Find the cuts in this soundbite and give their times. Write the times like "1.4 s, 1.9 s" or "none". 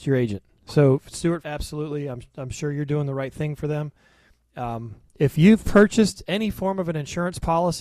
1.4 s